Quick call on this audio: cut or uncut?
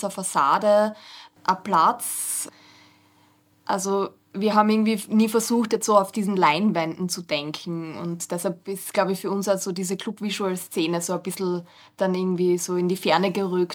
uncut